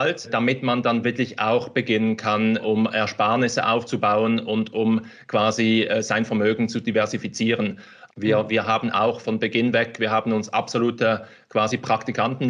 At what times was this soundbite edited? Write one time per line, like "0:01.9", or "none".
0:08.1
0:09.2

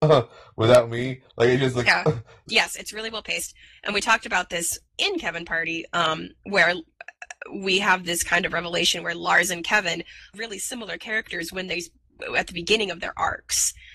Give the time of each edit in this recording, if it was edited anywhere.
0:02.5
0:10.3

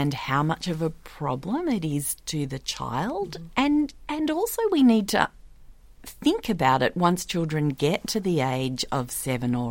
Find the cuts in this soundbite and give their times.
0:03.5

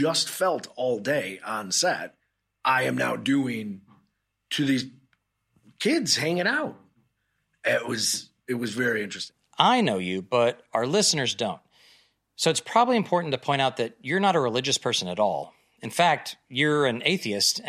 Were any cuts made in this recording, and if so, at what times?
none

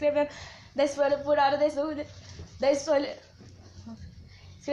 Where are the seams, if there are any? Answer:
none

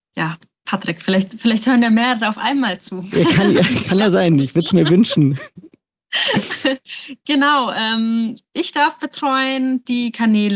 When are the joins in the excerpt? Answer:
none

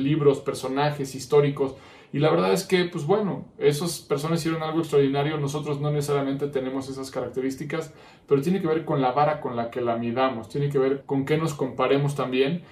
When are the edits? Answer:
0:11.0

